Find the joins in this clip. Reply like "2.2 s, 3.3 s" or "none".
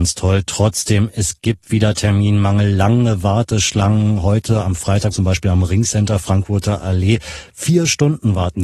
5.1 s